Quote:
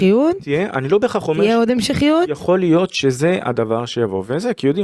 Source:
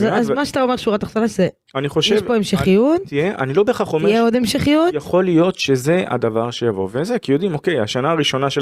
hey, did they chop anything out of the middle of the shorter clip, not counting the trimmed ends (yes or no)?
no